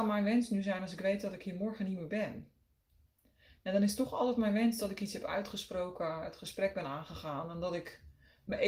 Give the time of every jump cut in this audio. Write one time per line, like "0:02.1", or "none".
none